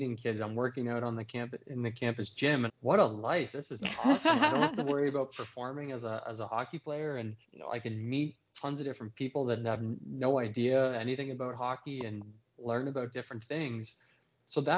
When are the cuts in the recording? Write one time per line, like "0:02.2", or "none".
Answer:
0:02.7
0:07.4